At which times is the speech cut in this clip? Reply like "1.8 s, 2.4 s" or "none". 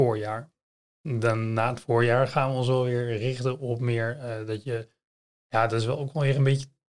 none

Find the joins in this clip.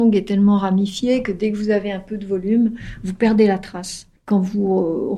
4.2 s

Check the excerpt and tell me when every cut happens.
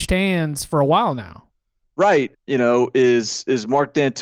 2.3 s

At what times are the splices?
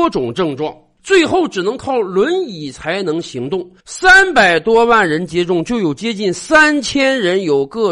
1.0 s, 3.8 s

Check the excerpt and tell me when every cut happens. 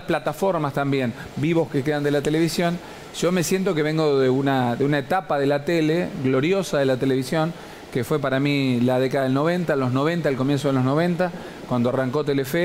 1.3 s

